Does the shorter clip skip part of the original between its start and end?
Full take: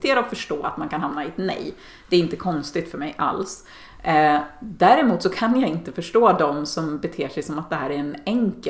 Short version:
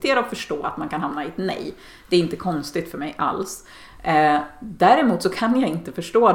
no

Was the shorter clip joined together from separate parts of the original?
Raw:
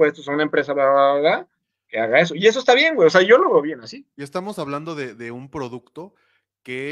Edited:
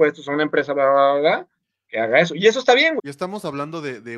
yes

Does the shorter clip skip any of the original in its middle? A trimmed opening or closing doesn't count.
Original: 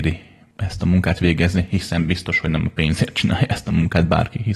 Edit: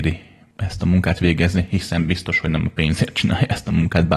no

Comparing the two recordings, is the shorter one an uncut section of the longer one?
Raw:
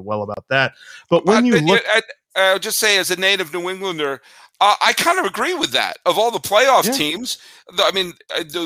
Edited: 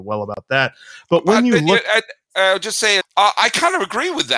no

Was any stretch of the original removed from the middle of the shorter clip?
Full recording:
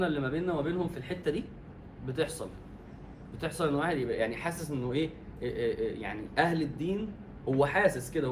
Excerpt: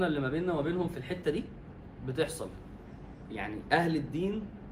yes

